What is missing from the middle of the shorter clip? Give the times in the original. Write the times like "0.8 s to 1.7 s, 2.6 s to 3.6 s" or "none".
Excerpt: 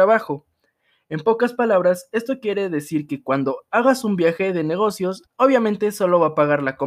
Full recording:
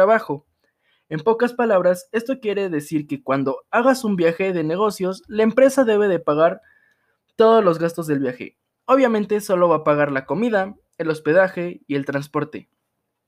5.2 s to 8.7 s

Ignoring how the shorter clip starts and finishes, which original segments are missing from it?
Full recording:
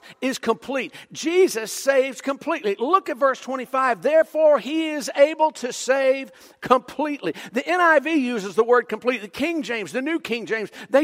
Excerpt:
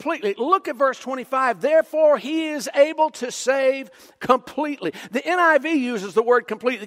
none

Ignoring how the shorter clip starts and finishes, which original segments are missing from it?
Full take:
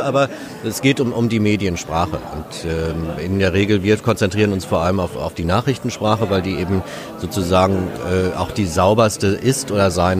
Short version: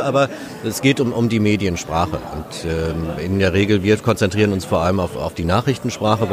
none

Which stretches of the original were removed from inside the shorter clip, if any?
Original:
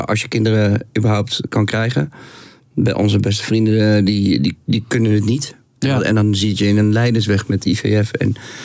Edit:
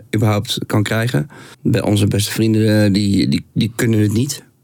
2.4 s to 2.7 s

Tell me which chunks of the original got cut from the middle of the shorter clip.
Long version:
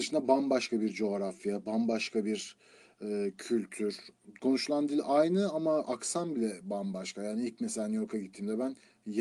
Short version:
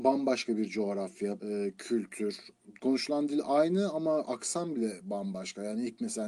1.6 s to 3.0 s

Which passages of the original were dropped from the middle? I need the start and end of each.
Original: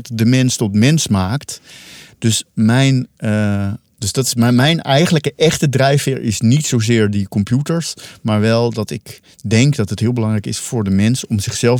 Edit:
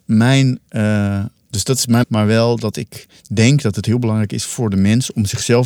4.5 s to 8.2 s

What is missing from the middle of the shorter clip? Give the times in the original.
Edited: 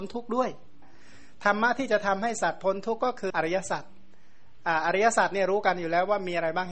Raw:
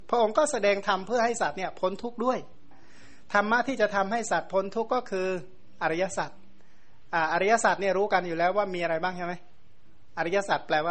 5.2 s to 5.8 s

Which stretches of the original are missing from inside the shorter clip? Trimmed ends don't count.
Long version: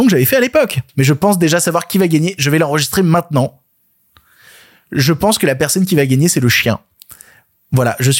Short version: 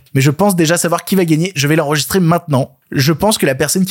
3.6 s to 4.8 s

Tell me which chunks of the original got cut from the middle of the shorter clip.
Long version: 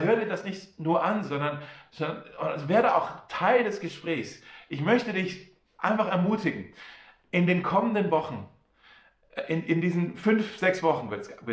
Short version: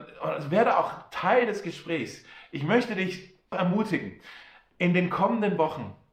5.7 s to 6.1 s

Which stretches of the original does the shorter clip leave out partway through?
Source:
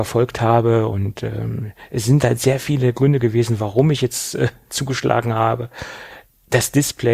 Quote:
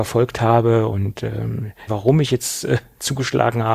1.9 s to 3.6 s

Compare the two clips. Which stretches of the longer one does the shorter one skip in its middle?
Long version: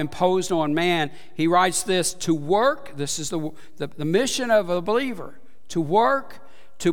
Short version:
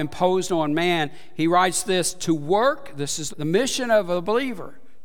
3.3 s to 3.9 s

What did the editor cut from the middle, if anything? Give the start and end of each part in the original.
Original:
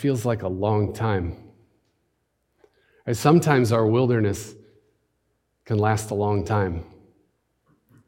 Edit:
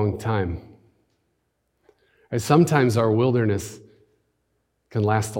none

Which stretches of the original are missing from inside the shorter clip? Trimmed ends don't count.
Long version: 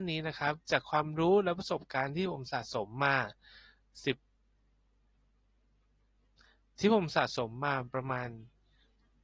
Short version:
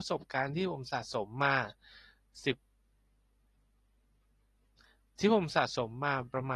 none

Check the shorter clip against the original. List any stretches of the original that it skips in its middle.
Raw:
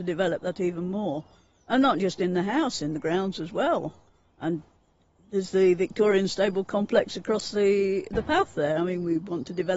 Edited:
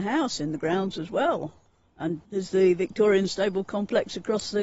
4.7 s to 5.2 s

